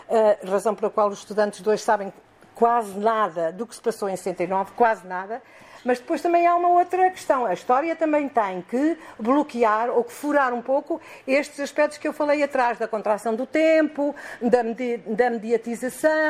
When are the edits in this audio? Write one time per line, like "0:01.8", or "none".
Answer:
none